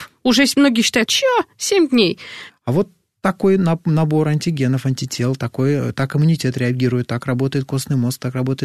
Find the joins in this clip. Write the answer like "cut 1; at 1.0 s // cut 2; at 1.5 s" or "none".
cut 1; at 1.1 s // cut 2; at 2.5 s